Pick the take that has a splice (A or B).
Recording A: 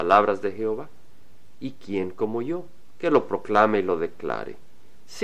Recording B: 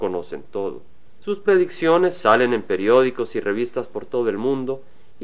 B